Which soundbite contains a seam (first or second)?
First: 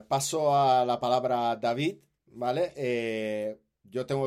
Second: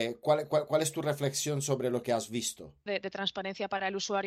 second